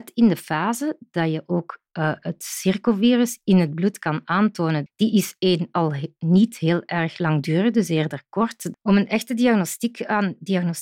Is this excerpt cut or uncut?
cut